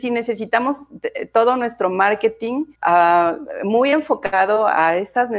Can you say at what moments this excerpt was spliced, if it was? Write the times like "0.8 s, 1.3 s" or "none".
2.7 s